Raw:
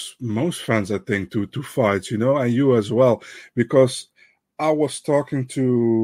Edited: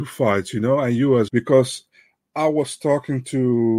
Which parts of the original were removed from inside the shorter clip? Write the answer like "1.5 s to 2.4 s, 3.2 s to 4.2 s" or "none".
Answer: 2.9 s to 3.5 s